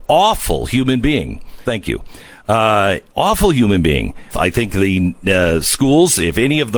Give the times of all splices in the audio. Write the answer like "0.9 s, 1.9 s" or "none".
1.6 s, 4.3 s